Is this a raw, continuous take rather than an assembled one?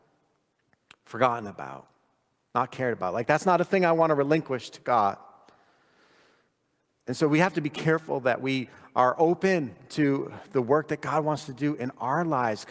yes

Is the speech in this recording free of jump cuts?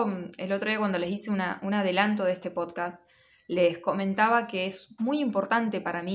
yes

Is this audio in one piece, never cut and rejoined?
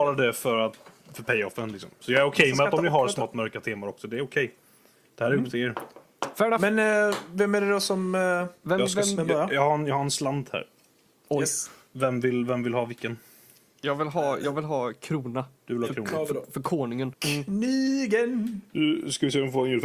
no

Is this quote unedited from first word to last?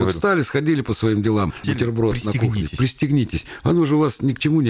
no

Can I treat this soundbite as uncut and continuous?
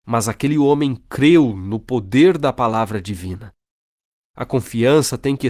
no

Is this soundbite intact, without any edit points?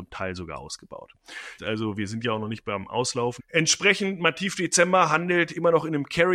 no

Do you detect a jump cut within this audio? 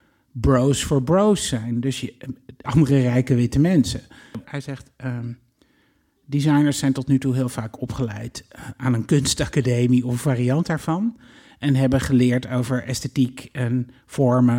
yes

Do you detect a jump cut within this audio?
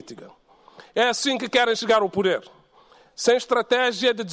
yes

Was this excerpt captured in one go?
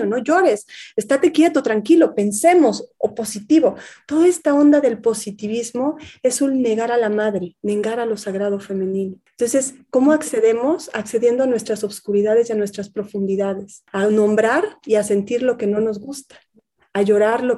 yes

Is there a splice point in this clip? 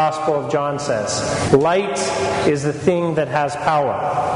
yes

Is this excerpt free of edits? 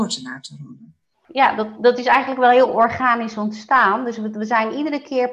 yes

